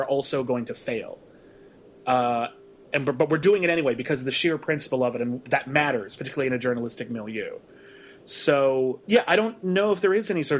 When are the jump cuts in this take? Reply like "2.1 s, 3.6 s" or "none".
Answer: 9.0 s